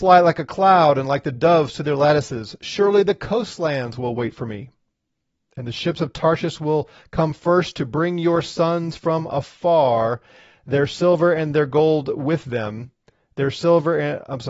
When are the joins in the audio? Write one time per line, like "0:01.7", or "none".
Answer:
none